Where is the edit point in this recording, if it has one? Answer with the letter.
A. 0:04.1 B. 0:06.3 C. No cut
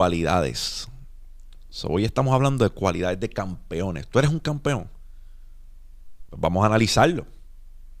B